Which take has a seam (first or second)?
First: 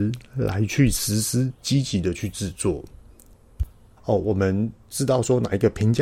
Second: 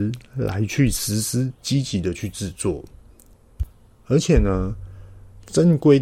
first